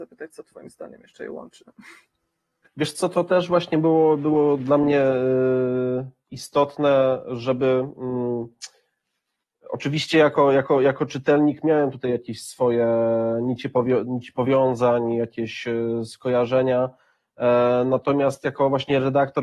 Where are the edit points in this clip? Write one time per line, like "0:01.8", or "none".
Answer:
0:02.6